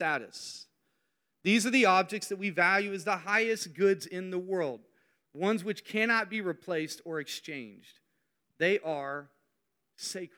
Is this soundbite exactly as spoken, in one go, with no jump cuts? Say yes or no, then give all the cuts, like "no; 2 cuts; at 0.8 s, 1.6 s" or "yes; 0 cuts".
yes; 0 cuts